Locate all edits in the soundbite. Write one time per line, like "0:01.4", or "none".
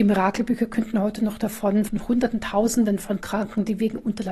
0:01.9